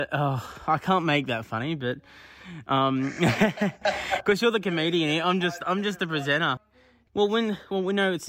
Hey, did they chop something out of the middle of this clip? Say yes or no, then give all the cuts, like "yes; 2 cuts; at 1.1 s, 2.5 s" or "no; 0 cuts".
no; 0 cuts